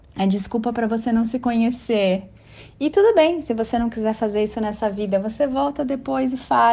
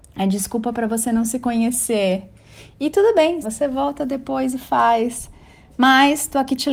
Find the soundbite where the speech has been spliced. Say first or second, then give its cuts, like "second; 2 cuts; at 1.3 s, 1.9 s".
second; 1 cut; at 3.4 s